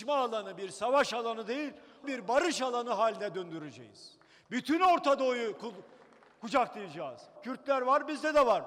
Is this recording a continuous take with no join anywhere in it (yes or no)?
no